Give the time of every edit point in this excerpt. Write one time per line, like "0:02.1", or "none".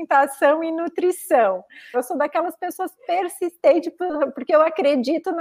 0:01.9